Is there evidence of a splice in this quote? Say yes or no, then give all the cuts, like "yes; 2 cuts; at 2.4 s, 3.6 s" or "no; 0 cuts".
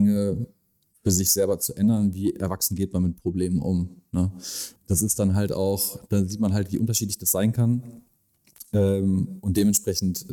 yes; 1 cut; at 4.8 s